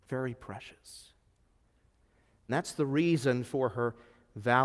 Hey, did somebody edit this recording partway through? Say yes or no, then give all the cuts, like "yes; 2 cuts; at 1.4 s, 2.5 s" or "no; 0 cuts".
yes; 1 cut; at 2.5 s